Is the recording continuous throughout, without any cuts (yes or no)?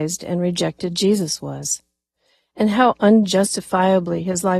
yes